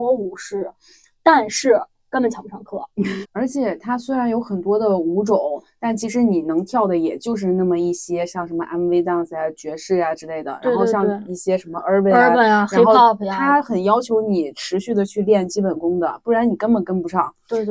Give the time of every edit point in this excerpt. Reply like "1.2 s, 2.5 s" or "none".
3.2 s

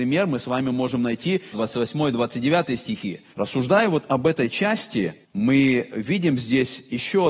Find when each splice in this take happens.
1.5 s, 3.3 s, 5.2 s

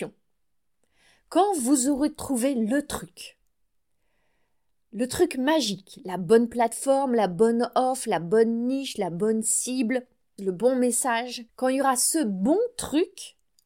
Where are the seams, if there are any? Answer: 10.4 s, 11.5 s

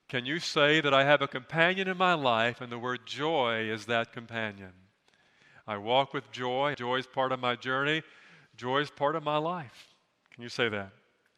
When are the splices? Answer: 6.7 s

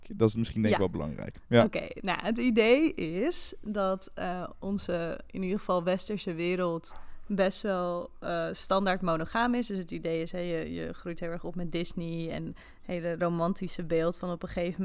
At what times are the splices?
none

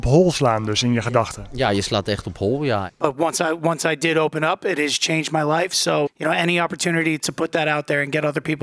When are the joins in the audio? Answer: 6.1 s, 7.2 s

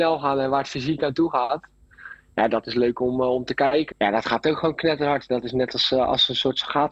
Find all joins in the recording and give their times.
3.9 s

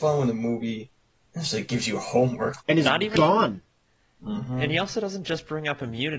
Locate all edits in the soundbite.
2.6 s

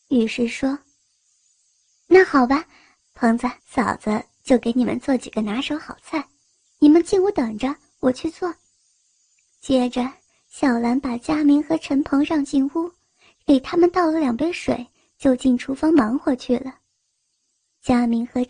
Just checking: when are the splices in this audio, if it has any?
3.6 s

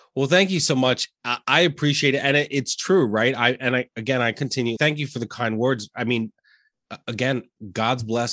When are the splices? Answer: 4.8 s

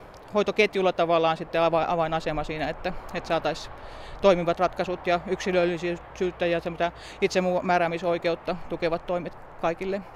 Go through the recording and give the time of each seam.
none

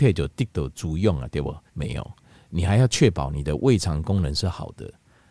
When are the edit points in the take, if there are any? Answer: 1.7 s

